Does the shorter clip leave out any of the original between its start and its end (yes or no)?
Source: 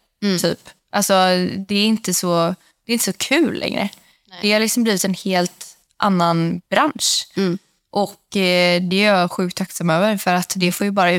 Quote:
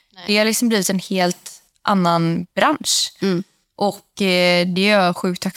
no